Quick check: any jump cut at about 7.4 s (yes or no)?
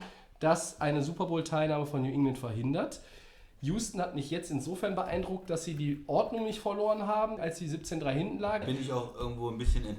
yes